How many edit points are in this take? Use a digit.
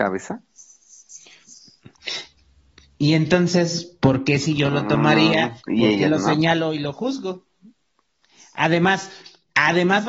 2